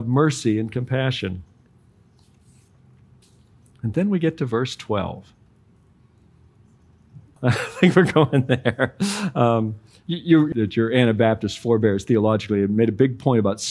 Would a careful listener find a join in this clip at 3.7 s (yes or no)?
no